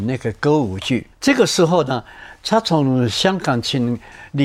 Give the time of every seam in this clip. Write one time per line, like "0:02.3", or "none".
0:01.1